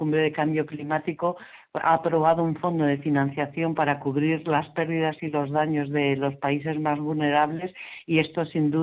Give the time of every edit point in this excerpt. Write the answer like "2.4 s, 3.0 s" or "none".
none